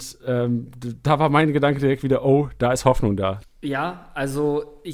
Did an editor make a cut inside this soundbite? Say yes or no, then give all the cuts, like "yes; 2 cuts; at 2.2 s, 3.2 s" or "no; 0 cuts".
yes; 1 cut; at 3.4 s